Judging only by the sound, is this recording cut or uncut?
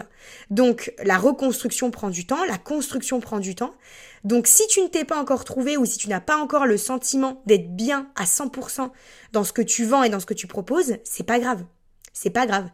uncut